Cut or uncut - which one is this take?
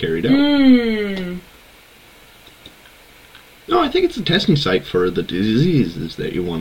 uncut